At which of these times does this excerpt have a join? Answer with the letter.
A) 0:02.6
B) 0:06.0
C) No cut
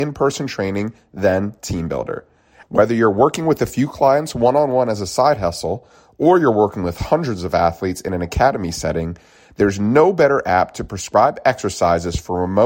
A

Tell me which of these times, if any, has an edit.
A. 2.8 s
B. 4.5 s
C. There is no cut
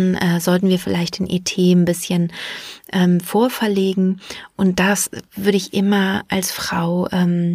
C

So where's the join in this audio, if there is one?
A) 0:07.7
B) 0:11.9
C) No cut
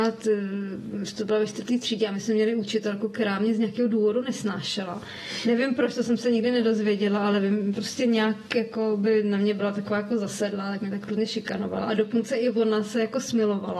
A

